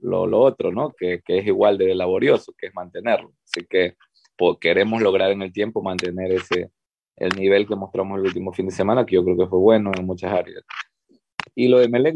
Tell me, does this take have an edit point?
no; 0 cuts

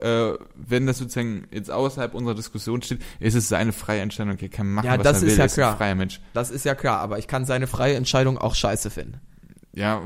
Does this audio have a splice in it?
no; 0 cuts

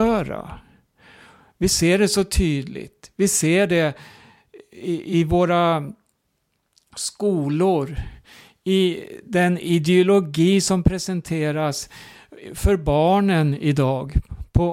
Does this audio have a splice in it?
yes; 1 cut; at 5.1 s

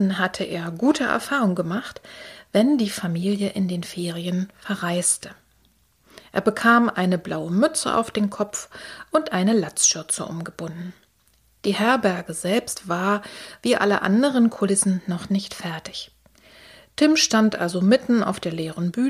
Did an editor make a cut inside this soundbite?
no; 0 cuts

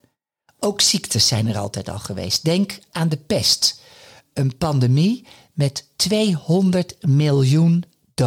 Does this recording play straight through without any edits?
yes; 0 cuts

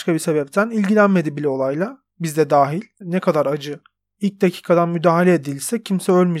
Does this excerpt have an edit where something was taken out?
yes; 1 cut; at 3.0 s

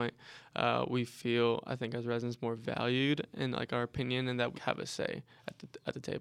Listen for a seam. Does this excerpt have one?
yes; 1 cut; at 4.5 s

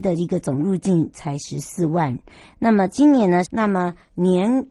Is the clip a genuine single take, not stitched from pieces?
no; 1 cut; at 3.5 s

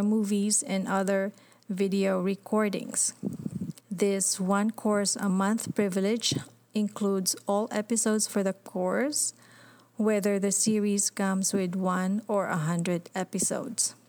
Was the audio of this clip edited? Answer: yes; 1 cut; at 3.8 s

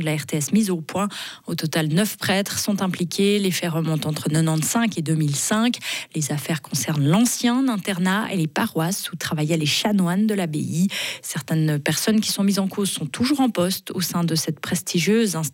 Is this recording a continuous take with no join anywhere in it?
yes; 0 cuts

